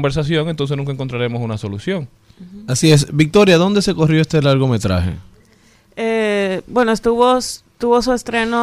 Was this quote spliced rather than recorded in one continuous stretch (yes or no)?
no